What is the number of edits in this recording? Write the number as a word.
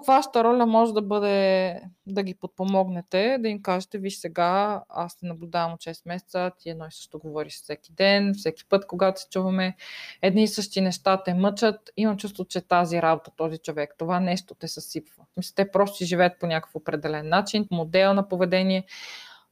two